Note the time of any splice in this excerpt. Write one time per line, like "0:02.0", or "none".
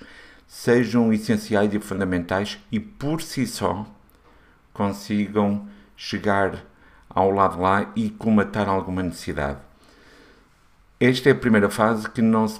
none